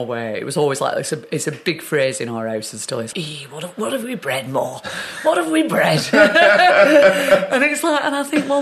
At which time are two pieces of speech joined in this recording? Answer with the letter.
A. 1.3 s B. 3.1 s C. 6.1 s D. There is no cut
B